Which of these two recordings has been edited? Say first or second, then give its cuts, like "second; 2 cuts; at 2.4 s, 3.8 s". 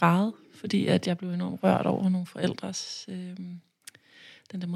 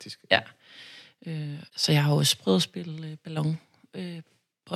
second; 1 cut; at 1.7 s